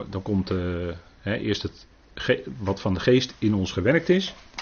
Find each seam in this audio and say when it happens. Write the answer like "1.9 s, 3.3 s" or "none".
none